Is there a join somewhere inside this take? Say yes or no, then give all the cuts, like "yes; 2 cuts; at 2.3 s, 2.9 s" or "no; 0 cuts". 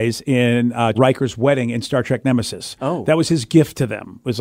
yes; 1 cut; at 0.9 s